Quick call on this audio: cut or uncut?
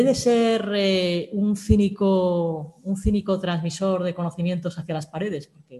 uncut